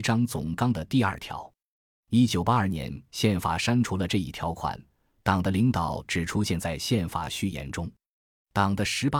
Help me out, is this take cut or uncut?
uncut